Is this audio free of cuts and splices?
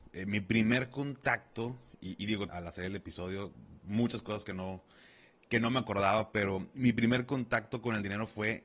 no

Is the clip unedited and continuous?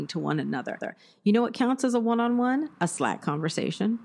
yes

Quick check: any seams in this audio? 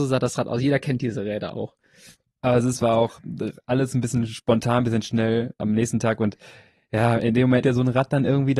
yes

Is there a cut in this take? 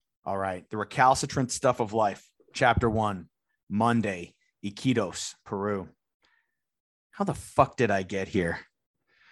no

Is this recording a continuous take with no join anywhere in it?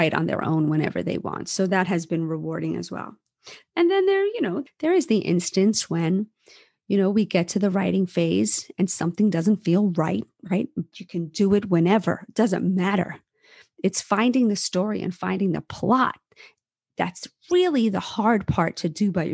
no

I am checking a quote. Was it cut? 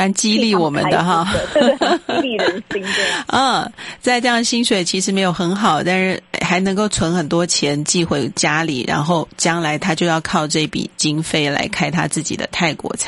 no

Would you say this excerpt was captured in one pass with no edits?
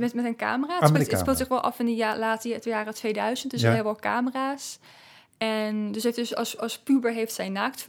yes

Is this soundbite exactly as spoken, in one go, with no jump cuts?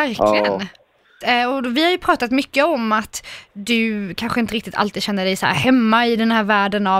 no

